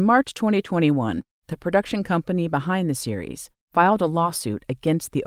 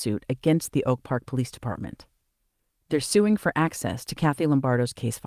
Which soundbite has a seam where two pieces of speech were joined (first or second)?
first